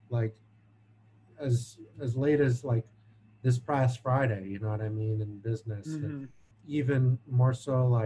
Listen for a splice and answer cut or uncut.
cut